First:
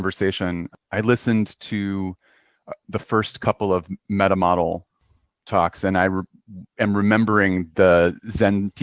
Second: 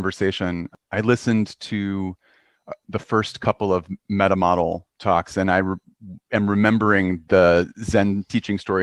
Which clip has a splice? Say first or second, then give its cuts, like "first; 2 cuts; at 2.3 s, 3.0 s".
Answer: second; 1 cut; at 4.9 s